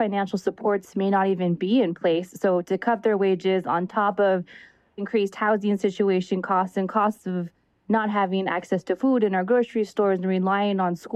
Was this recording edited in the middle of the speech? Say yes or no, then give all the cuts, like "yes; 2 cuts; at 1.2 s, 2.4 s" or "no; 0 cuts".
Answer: yes; 1 cut; at 5.0 s